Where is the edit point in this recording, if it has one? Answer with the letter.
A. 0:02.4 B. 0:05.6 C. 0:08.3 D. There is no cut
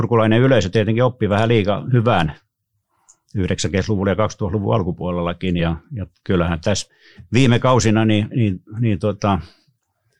B